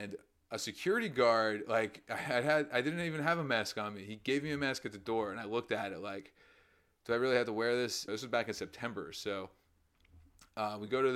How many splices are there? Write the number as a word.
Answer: one